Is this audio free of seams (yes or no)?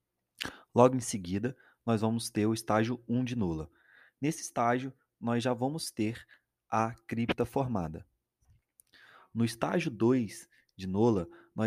yes